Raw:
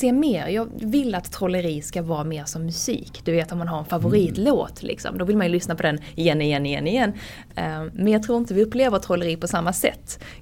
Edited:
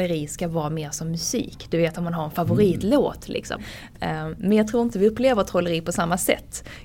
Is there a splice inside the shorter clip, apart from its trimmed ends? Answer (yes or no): yes